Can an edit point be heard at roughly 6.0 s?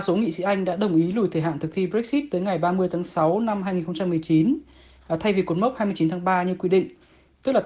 no; 0 cuts

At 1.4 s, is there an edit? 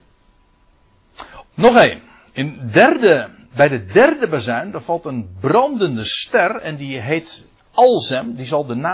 yes; 2 cuts; at 1.4 s, 3.5 s

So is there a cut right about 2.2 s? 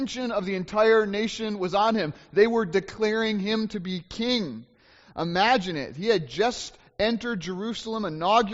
no; 0 cuts

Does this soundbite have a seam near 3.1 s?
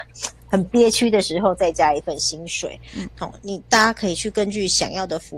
yes; 1 cut; at 3.1 s

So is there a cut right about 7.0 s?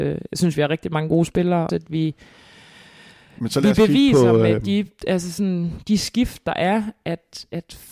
no; 1 cut; at 1.7 s

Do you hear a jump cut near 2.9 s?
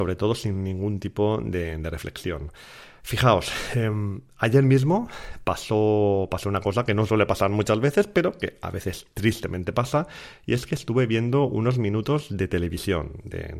no; 0 cuts

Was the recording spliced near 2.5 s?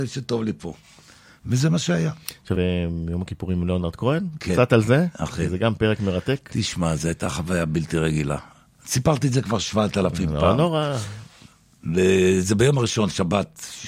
yes; 1 cut; at 2.5 s

